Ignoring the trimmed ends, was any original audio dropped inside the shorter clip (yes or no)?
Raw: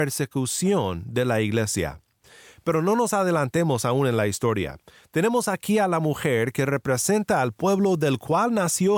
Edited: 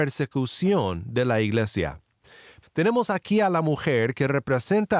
yes